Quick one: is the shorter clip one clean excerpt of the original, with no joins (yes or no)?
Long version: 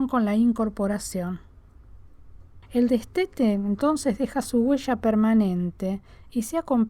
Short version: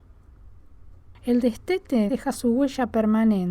no